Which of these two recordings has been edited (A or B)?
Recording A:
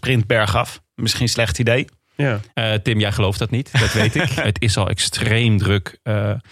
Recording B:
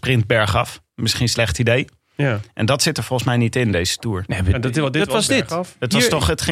A